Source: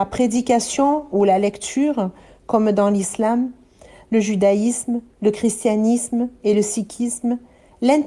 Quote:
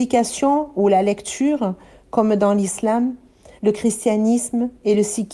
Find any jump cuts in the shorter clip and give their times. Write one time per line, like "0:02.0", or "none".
0:03.6